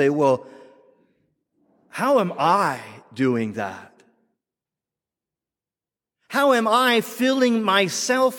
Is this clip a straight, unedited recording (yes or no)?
yes